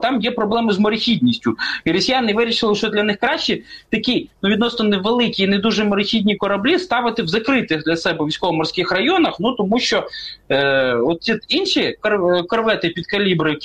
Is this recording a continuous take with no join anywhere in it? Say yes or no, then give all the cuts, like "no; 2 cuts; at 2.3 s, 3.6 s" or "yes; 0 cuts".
yes; 0 cuts